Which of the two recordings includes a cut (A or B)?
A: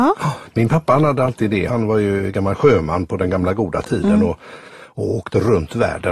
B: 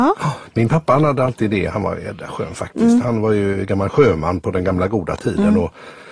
A